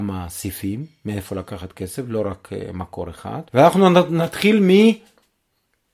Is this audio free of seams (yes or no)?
no